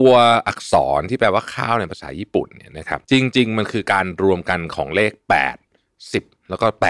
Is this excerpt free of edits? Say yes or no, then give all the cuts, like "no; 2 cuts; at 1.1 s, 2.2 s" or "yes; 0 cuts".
no; 1 cut; at 3.0 s